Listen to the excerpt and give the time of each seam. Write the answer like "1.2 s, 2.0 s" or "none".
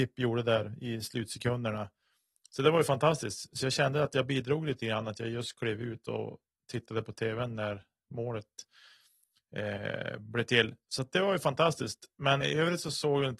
12.4 s